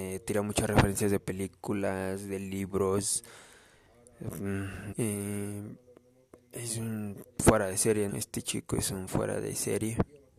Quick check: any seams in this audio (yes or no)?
yes